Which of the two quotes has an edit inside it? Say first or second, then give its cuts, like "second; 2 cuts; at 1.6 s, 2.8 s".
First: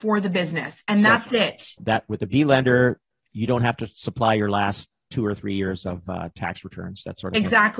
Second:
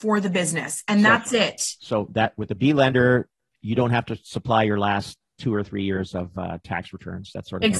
first; 1 cut; at 1.8 s